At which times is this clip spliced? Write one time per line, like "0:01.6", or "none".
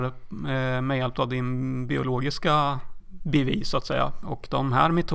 0:03.0
0:04.2

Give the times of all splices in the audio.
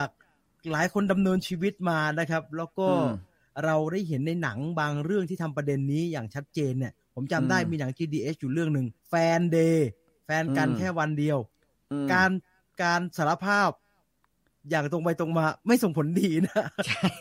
0:09.0

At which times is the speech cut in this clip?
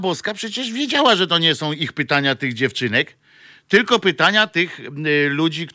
none

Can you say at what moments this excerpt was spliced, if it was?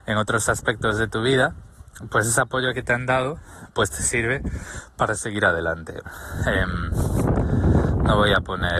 0:06.1

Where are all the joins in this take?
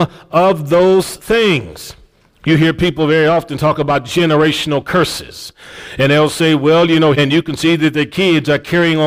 0:07.1

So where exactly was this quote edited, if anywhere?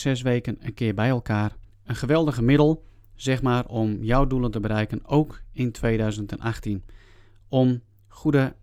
0:01.7

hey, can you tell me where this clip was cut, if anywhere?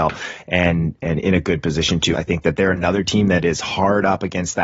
0:02.1

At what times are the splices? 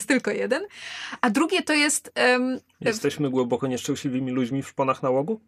none

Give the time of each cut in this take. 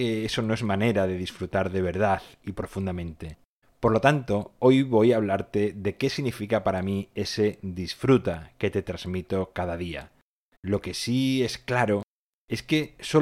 0:03.6
0:10.6

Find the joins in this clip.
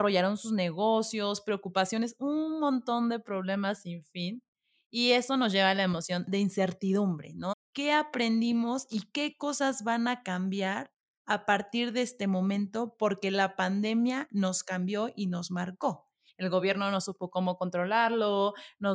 0:07.5
0:16.3

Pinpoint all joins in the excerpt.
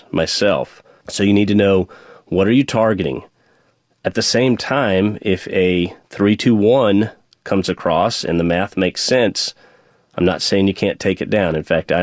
0:01.0

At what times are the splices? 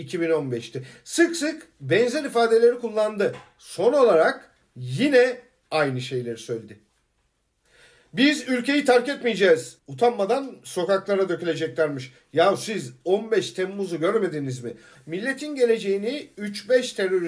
0:09.8
0:14.9

